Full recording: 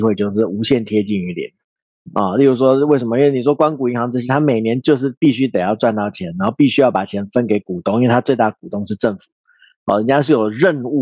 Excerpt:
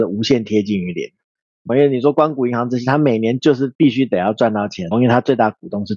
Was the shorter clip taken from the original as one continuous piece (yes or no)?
no